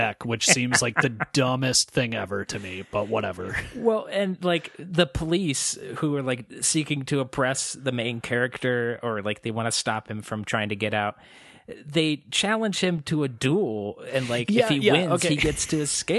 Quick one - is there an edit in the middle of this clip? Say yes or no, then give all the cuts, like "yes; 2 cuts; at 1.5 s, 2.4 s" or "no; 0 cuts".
no; 0 cuts